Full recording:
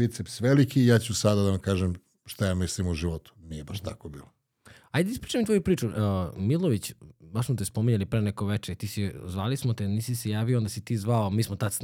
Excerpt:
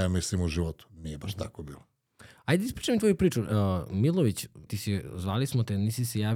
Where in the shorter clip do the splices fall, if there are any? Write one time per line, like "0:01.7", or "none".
0:04.7